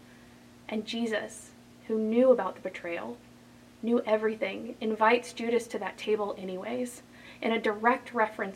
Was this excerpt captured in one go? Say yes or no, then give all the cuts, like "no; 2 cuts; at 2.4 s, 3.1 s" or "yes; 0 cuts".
yes; 0 cuts